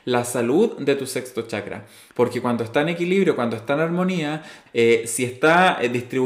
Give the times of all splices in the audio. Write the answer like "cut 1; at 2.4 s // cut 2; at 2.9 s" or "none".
cut 1; at 2.1 s // cut 2; at 4.7 s